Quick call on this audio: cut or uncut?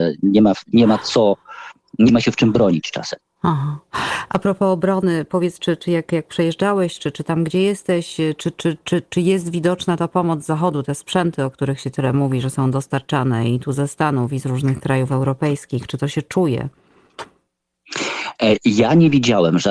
uncut